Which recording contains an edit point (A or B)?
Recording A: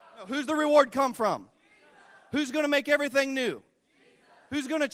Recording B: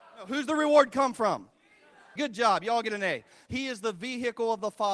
B